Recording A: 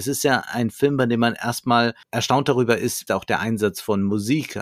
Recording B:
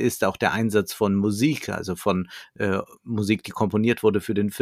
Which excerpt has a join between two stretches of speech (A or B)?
A